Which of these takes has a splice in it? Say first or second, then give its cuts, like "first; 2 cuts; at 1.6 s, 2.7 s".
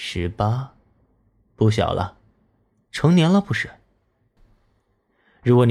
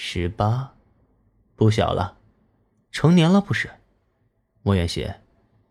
first; 1 cut; at 4.4 s